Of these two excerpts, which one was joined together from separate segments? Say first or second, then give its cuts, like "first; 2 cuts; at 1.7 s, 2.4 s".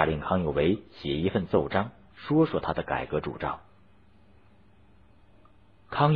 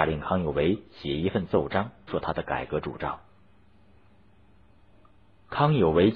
second; 1 cut; at 2.1 s